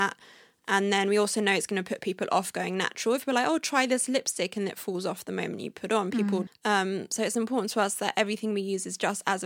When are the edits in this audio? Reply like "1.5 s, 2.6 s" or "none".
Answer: 6.5 s